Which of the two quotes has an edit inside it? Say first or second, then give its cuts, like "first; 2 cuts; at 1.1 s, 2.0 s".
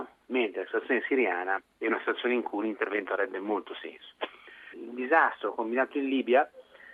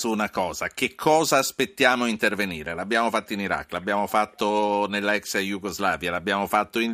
first; 1 cut; at 4.7 s